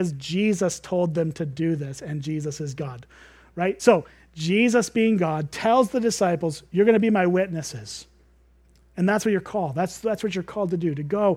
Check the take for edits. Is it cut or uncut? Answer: uncut